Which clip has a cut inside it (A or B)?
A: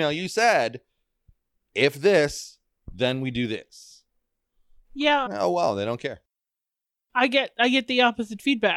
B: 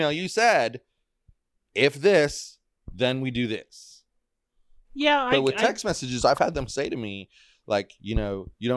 A